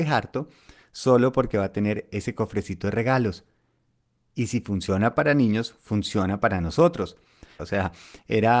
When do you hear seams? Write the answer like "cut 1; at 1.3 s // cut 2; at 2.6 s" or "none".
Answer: cut 1; at 7.6 s